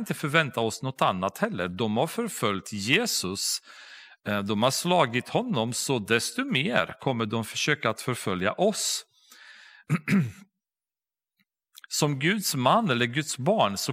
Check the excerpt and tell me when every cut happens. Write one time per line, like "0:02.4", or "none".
none